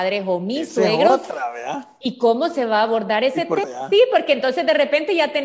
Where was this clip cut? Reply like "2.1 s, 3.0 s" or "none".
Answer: 3.6 s